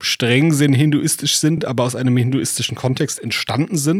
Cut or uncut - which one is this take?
uncut